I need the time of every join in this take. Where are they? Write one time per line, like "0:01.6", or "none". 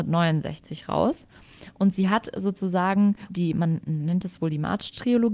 0:03.3

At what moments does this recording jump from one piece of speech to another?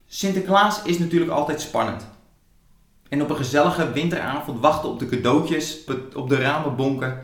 0:05.9

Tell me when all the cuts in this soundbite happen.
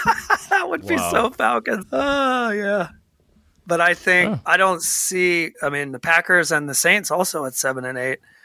0:01.8
0:05.5

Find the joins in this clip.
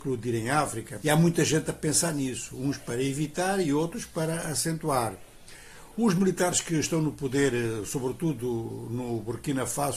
0:01.0

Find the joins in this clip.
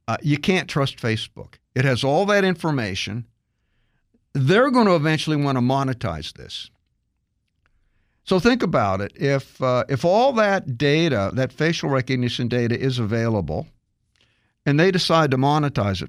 none

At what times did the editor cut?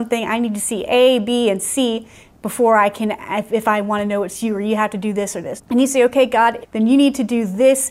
0:05.6
0:06.6

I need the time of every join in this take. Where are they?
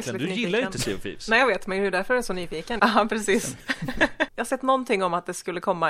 0:02.8
0:04.3

